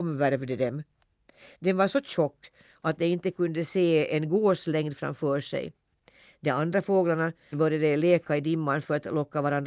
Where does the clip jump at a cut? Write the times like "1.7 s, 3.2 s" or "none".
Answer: 7.5 s